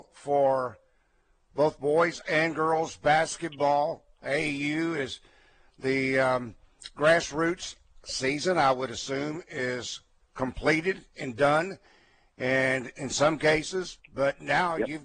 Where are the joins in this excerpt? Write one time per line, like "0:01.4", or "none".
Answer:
0:14.0